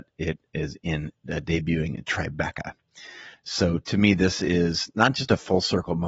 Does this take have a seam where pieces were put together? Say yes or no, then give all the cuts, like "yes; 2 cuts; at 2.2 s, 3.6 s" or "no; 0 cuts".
no; 0 cuts